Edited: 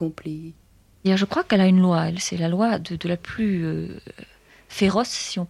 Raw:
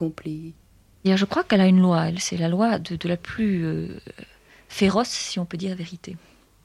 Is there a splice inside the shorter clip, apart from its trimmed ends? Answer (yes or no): no